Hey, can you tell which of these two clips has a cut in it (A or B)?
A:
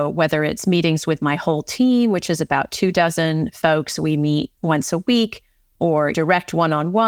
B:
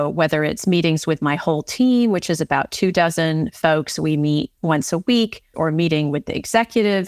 B